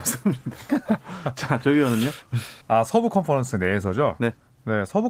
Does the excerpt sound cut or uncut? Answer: cut